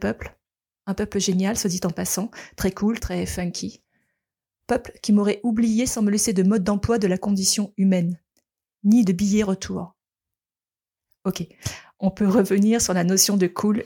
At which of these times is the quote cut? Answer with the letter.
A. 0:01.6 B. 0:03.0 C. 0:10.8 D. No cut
B